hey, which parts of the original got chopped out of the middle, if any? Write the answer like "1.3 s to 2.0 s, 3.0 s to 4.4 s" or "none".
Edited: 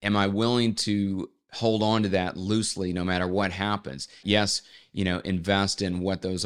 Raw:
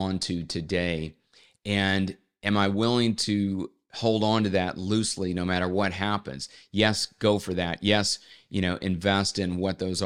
6.6 s to 7.8 s